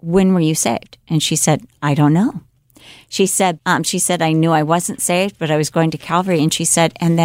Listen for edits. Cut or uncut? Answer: cut